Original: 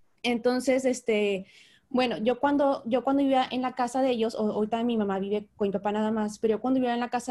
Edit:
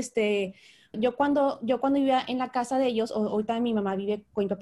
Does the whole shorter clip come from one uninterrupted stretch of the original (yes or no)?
no